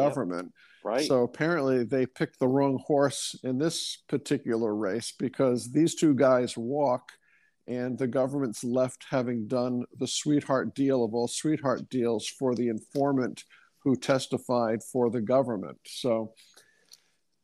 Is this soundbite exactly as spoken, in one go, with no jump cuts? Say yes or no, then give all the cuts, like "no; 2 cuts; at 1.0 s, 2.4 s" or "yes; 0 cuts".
yes; 0 cuts